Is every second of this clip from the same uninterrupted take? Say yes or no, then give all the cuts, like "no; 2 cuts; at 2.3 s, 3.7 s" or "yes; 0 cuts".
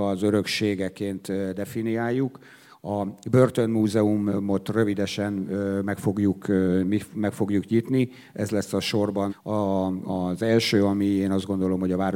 no; 1 cut; at 9.3 s